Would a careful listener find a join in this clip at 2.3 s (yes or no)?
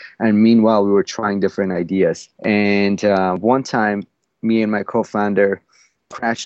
yes